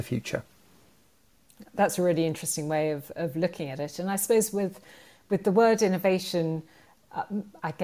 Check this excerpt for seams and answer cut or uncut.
uncut